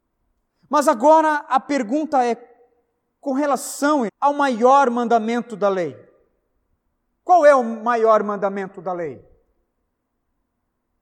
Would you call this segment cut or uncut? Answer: cut